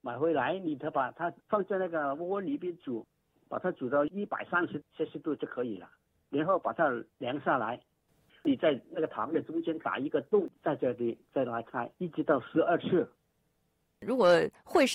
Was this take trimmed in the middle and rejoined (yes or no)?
yes